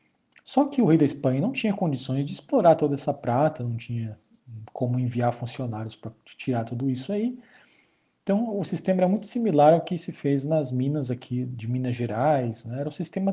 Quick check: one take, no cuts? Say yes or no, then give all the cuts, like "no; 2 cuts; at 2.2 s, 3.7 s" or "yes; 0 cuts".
yes; 0 cuts